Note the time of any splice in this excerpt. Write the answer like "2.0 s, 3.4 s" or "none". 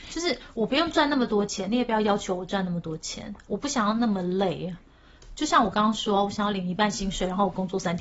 none